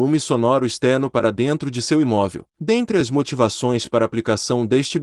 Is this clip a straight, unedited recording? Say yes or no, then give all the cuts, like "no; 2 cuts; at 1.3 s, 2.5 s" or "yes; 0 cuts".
no; 1 cut; at 2.5 s